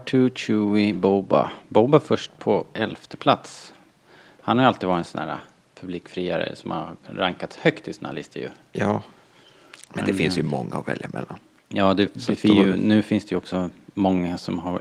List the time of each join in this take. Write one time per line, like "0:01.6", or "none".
none